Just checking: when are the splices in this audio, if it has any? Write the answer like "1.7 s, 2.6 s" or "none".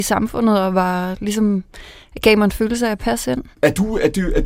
3.5 s